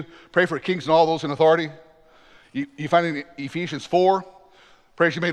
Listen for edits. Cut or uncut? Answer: uncut